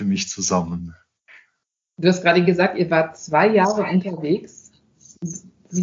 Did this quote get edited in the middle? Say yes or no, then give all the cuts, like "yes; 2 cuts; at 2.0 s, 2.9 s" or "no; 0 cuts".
no; 0 cuts